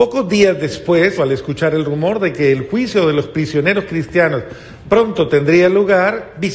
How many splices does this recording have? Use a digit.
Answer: 1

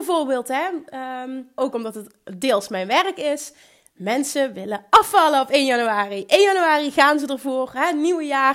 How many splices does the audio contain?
1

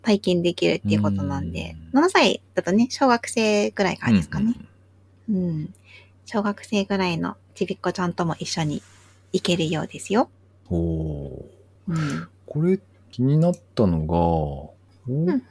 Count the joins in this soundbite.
0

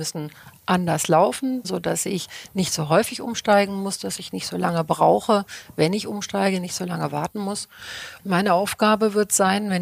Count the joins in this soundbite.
2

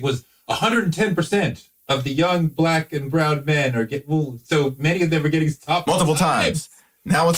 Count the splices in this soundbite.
1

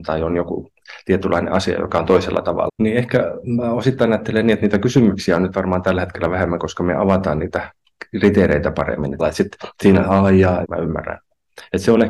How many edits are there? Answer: 3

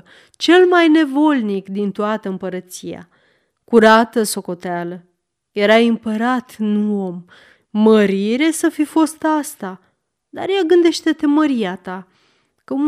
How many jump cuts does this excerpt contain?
1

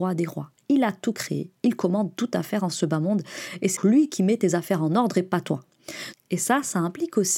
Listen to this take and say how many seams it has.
2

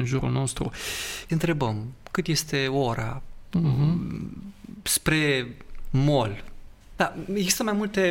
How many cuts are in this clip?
2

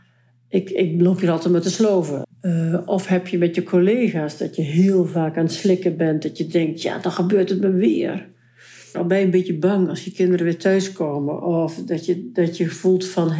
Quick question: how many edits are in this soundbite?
2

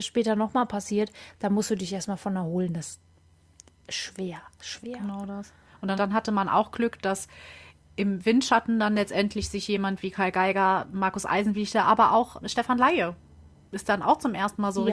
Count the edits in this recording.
2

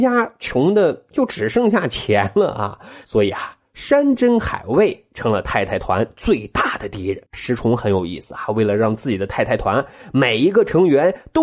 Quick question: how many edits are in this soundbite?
1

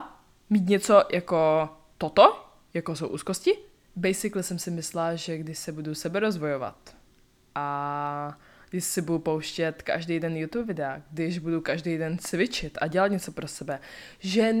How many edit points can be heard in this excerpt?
1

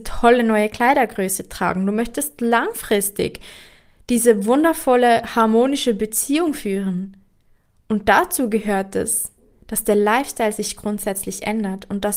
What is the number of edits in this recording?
0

